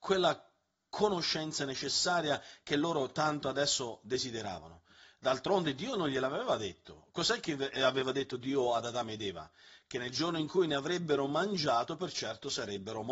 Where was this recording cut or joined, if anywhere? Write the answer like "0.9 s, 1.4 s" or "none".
none